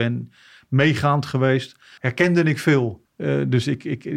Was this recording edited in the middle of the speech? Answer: yes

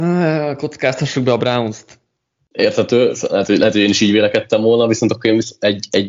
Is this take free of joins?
no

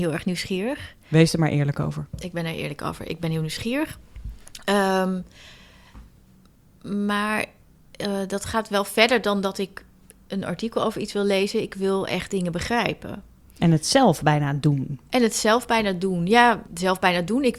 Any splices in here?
yes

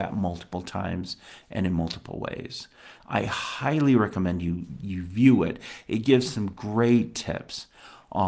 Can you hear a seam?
yes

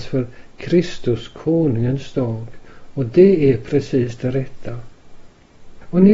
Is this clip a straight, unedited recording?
yes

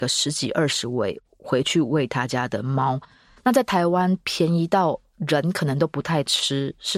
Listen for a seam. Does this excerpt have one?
no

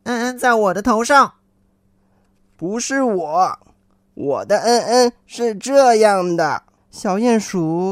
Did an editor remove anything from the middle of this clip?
yes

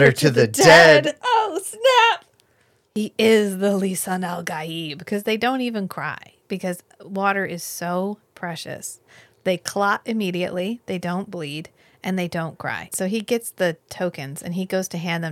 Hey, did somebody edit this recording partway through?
yes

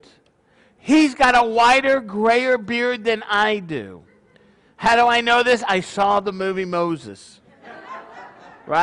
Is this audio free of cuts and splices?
yes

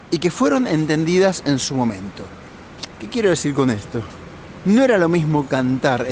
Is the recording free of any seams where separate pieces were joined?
yes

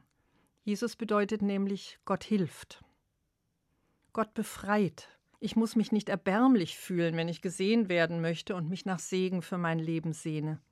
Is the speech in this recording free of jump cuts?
no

